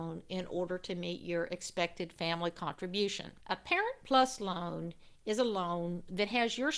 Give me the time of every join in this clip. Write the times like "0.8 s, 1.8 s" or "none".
3.4 s